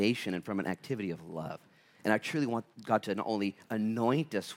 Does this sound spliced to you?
no; 0 cuts

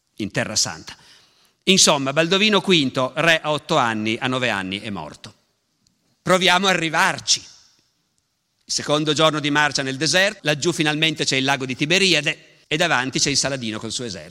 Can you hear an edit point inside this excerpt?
yes; 3 cuts; at 6.2 s, 10.4 s, 12.6 s

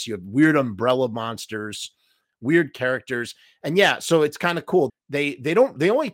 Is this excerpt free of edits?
no; 1 cut; at 4.9 s

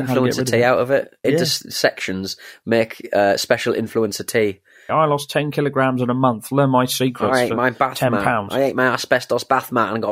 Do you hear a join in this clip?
yes; 2 cuts; at 1.2 s, 4.9 s

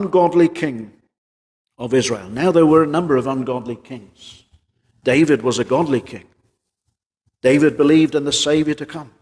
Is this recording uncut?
yes; 0 cuts

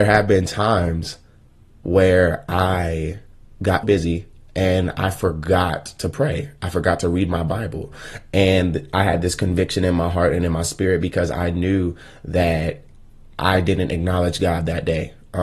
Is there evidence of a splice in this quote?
yes; 1 cut; at 3.8 s

